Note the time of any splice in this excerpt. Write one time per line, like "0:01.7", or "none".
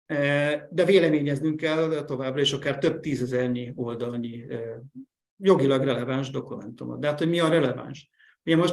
none